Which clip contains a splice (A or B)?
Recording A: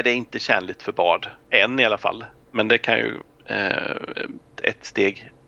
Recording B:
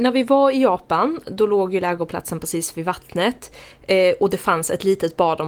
A